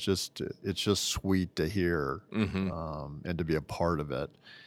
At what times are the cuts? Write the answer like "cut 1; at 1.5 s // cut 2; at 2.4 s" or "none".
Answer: none